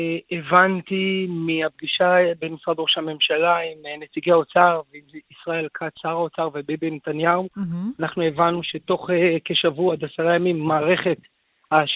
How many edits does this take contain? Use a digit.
0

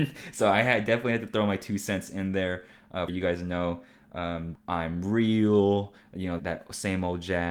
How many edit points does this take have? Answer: 3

